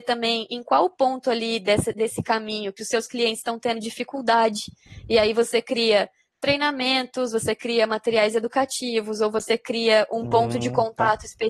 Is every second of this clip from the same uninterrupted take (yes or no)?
yes